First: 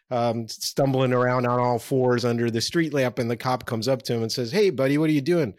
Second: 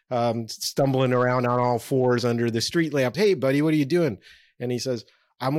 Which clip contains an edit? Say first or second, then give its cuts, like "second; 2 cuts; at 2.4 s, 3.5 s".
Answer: second; 1 cut; at 3.1 s